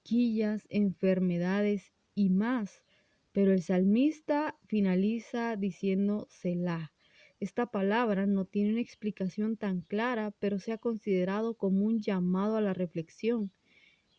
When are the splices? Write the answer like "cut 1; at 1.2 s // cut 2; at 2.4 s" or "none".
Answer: none